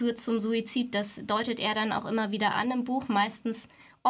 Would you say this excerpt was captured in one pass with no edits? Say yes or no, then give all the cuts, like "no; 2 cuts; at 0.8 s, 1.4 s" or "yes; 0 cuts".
yes; 0 cuts